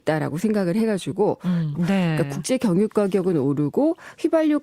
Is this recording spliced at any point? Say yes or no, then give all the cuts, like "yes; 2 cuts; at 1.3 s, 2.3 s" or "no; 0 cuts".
yes; 1 cut; at 1.7 s